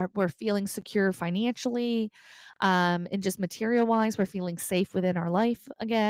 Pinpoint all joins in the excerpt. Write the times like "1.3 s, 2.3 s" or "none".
none